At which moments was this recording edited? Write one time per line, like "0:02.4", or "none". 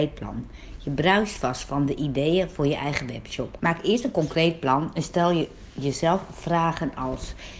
0:03.6